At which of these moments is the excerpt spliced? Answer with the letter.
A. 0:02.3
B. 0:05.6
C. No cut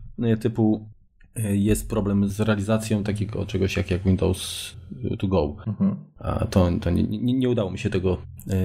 A